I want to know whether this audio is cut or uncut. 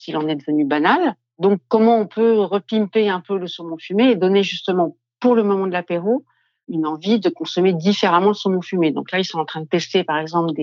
uncut